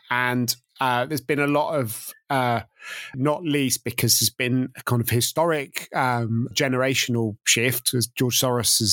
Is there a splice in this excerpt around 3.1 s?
yes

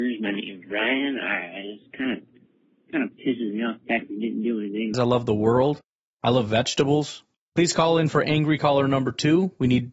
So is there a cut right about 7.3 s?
yes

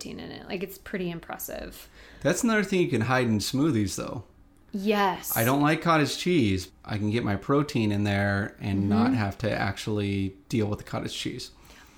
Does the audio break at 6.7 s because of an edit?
yes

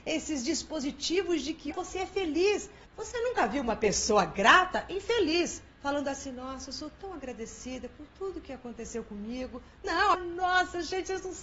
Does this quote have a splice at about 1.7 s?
yes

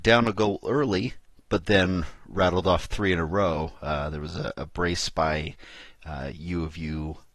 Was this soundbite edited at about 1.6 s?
no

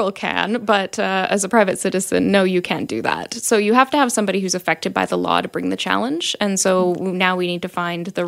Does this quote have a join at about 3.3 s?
no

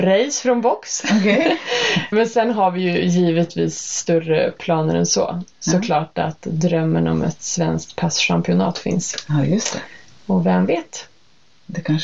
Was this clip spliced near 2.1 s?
yes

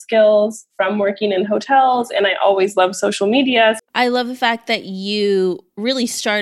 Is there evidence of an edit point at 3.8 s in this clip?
yes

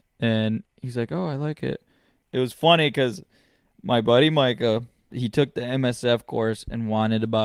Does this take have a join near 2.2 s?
yes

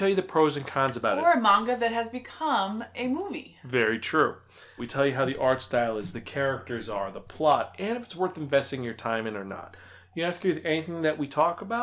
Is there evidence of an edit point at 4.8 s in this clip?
yes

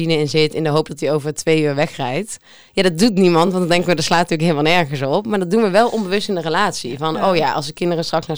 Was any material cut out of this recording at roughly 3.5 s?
no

